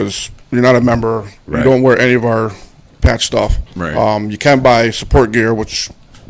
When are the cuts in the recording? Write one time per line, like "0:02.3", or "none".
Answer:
none